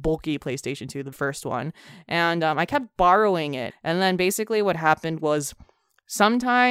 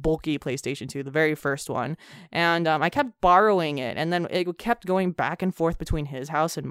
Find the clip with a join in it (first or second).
first